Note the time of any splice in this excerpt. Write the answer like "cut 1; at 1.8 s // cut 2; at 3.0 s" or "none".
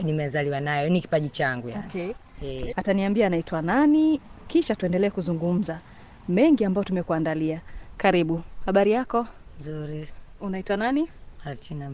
cut 1; at 2.7 s